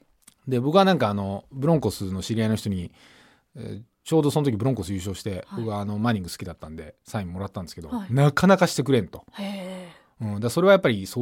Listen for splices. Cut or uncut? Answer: uncut